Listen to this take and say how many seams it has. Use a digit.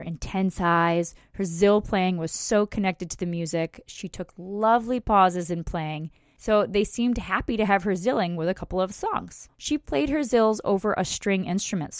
2